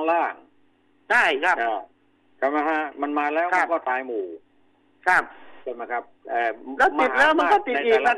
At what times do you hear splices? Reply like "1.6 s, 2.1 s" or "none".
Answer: none